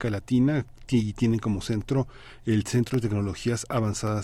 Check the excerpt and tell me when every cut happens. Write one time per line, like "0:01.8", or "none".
none